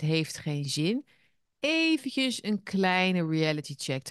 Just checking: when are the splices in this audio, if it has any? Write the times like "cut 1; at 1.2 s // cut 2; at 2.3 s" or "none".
none